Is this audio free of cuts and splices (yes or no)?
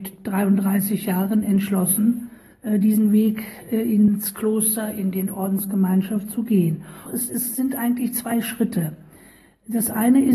no